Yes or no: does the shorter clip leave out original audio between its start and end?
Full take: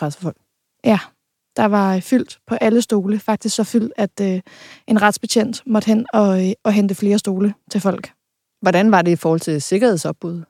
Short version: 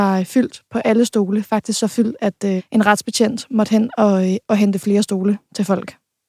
yes